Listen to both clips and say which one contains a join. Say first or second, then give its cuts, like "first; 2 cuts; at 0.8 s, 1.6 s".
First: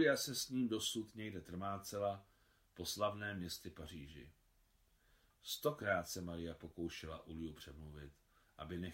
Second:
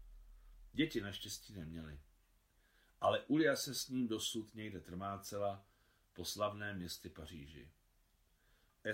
first; 1 cut; at 5.3 s